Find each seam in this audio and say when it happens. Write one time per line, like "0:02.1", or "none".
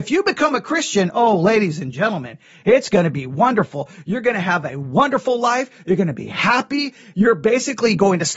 0:07.1